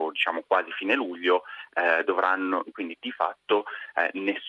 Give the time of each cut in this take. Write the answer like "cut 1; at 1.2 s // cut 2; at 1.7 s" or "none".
cut 1; at 2.7 s

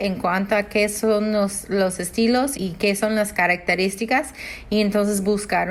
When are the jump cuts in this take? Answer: cut 1; at 2.5 s

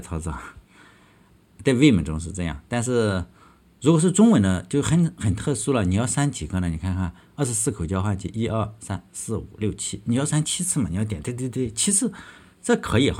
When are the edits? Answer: none

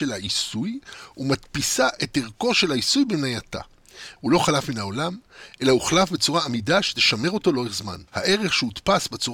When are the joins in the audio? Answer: cut 1; at 4.2 s // cut 2; at 8.1 s

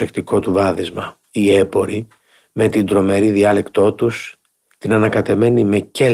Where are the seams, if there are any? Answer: cut 1; at 1.2 s

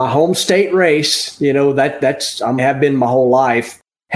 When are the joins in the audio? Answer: cut 1; at 2.6 s

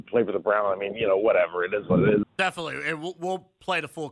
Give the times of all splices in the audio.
cut 1; at 2.2 s

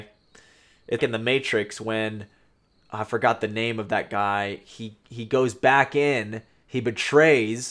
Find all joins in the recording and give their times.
cut 1; at 1.0 s

